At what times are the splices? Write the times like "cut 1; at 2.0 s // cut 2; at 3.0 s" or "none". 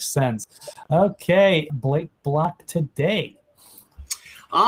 cut 1; at 1.7 s